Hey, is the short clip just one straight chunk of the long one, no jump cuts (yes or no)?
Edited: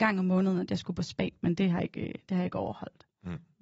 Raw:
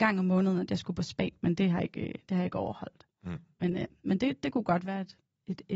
yes